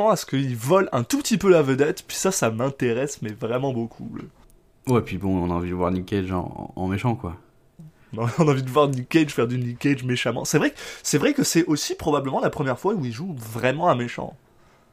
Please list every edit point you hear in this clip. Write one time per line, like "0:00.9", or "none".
none